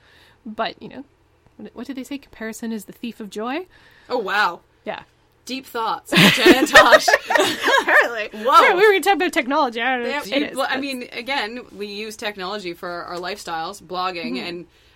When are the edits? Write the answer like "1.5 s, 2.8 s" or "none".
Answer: 10.2 s, 11.7 s